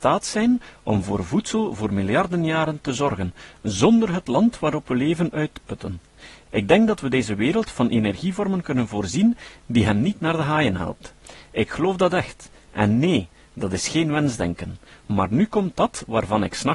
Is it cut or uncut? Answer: uncut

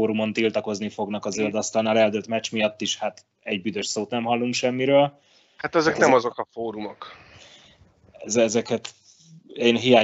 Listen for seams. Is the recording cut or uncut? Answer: uncut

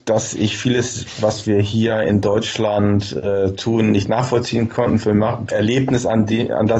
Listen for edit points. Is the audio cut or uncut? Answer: cut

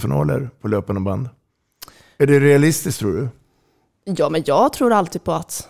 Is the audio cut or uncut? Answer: uncut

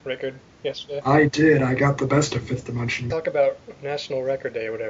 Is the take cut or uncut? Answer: cut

